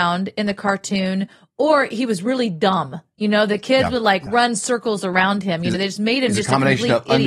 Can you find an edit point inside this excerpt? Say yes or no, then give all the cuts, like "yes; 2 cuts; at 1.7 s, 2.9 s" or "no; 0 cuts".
no; 0 cuts